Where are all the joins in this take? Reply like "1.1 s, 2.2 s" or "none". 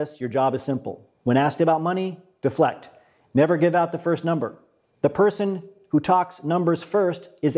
none